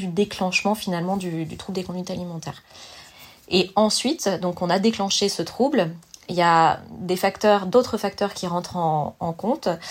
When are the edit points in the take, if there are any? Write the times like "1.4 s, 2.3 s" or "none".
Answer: none